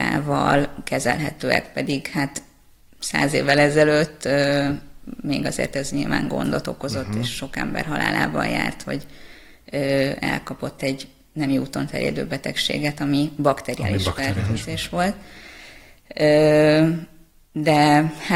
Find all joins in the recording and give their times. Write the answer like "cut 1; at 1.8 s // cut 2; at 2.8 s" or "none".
none